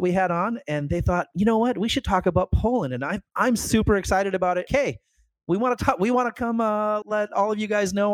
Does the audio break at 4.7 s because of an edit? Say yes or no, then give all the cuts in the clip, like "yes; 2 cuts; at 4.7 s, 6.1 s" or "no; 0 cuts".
yes; 2 cuts; at 4.7 s, 7.0 s